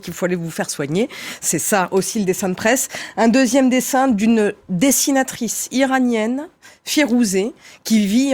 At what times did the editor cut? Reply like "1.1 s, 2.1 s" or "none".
none